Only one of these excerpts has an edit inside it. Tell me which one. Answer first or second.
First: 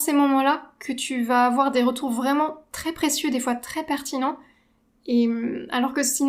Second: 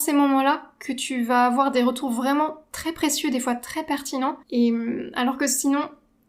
second